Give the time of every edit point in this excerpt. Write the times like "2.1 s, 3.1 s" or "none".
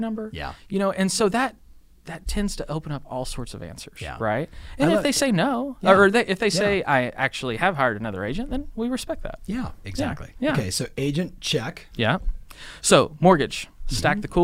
none